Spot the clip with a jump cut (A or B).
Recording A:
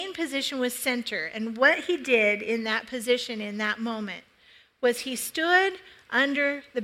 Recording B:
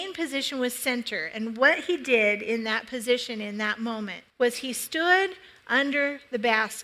B